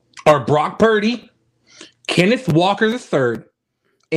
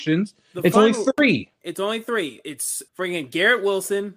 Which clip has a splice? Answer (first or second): second